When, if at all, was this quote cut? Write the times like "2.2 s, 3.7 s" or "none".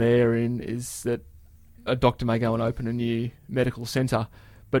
1.9 s